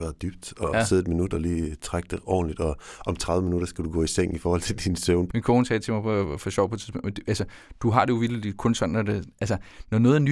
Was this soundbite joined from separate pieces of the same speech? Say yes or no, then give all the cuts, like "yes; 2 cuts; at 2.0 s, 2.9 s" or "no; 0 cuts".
yes; 1 cut; at 5.3 s